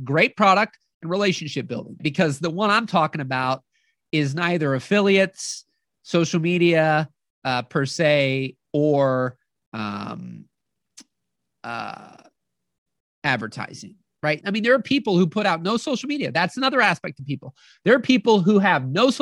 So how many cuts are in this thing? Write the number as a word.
two